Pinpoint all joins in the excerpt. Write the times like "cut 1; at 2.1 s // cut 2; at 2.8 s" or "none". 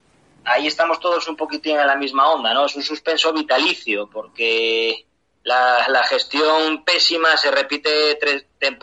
none